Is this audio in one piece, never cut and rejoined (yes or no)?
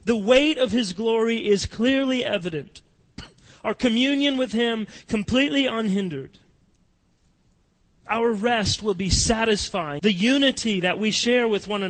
no